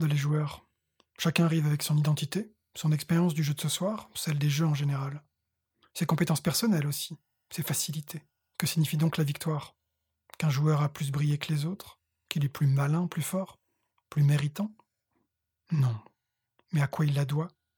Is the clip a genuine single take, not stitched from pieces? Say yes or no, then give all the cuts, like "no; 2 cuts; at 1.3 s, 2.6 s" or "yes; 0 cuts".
no; 3 cuts; at 8.5 s, 13.1 s, 16.7 s